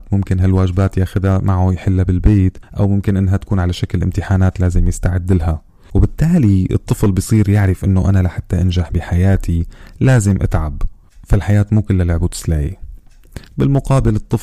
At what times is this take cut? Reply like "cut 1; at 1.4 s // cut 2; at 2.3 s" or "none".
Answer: none